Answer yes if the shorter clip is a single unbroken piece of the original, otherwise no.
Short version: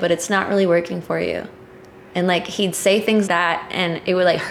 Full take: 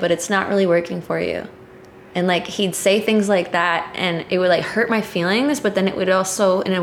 no